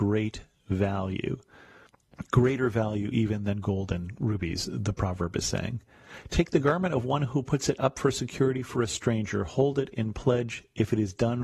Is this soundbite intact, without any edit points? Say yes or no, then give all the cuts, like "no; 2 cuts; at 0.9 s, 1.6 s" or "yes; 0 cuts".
yes; 0 cuts